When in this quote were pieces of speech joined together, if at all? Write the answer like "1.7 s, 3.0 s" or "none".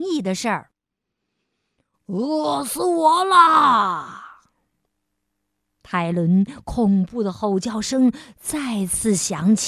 none

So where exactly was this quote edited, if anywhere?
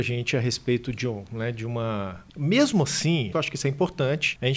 2.3 s, 3.3 s

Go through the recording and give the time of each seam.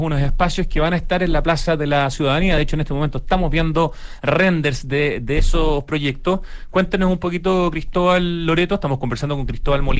none

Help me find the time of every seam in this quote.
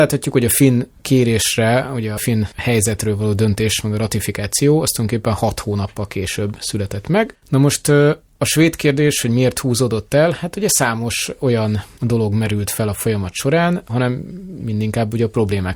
7.3 s, 13.9 s

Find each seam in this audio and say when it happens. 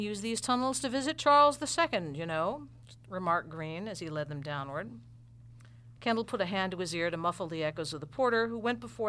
6.0 s

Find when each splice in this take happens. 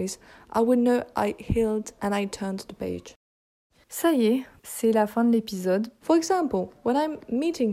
2.0 s, 6.0 s

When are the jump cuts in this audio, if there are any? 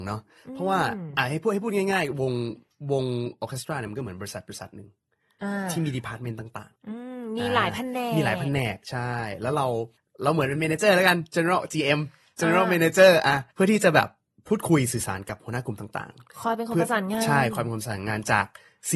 6.8 s

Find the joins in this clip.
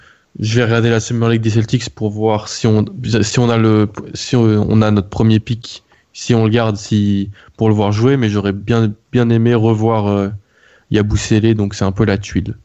none

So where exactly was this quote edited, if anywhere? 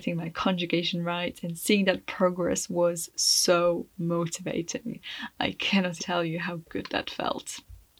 6.0 s

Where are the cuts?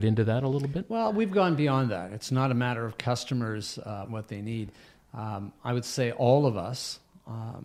4.0 s

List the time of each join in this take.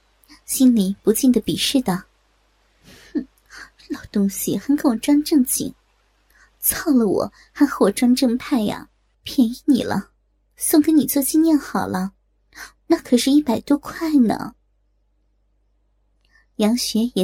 9.1 s

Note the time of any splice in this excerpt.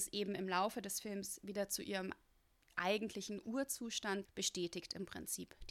4.3 s

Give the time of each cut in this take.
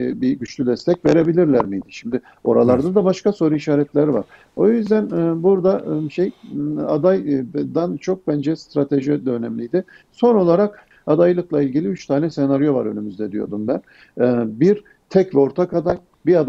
none

